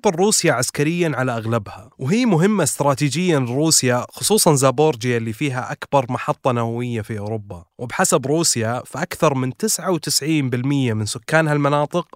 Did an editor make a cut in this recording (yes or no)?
yes